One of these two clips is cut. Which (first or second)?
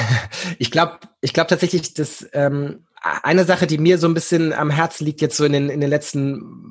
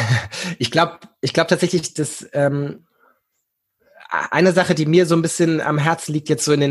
first